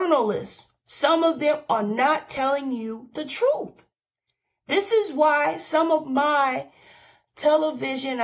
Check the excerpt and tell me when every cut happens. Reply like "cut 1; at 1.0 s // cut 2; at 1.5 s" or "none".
none